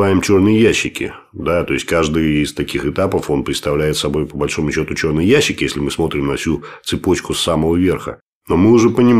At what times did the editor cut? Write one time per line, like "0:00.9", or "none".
none